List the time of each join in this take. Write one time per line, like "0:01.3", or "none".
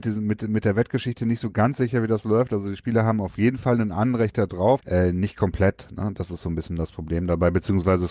0:04.8